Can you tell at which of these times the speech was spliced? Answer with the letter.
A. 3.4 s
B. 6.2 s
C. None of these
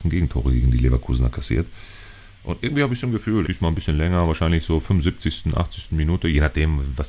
A